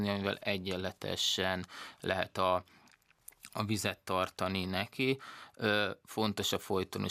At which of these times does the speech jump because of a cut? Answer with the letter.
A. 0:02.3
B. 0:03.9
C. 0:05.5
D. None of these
D